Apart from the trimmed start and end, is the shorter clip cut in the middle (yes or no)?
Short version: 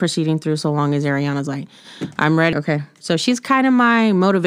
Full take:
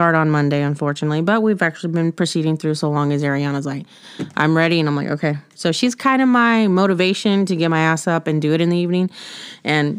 yes